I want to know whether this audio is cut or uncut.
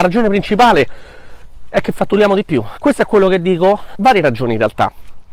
cut